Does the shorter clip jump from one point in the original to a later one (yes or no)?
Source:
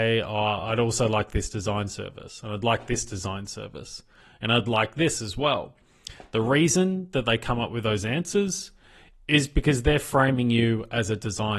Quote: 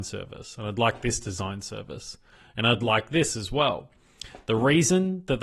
no